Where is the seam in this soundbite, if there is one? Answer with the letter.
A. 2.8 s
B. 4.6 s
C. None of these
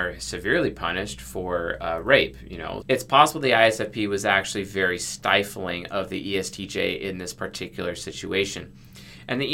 A